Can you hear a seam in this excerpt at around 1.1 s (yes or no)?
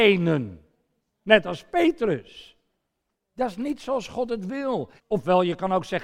no